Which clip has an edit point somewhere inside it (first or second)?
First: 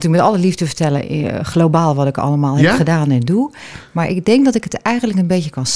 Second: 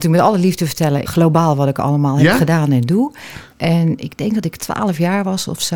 second